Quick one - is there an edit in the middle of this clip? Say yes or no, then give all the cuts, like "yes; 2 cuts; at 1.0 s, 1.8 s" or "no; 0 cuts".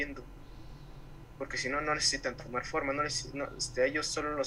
no; 0 cuts